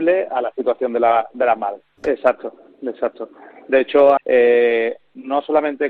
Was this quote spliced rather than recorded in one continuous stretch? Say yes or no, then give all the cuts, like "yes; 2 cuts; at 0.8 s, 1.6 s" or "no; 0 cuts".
yes; 2 cuts; at 2.0 s, 4.2 s